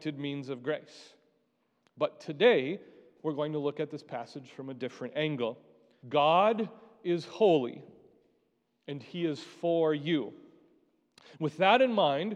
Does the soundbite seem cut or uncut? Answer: cut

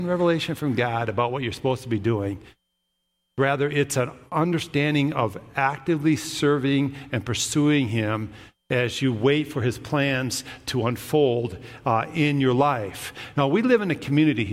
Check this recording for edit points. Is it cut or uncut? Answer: uncut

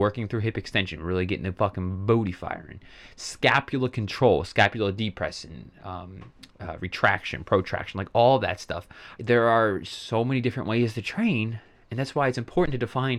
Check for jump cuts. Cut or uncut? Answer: cut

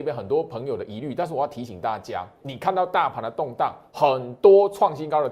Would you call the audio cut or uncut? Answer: cut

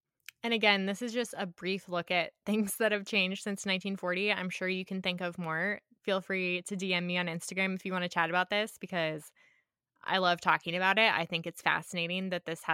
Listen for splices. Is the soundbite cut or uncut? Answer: uncut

